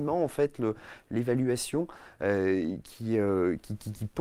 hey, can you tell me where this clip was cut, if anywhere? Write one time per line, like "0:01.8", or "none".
none